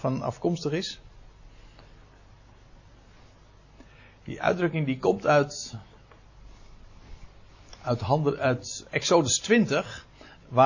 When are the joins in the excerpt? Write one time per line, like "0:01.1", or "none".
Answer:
none